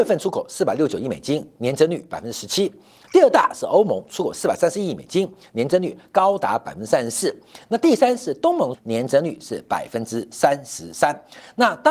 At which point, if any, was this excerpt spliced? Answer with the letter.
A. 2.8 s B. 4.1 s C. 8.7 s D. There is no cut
C